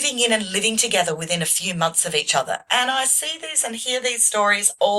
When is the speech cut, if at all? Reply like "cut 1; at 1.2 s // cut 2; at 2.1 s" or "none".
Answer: none